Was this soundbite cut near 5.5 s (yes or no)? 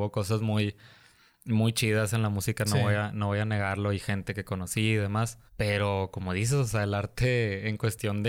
yes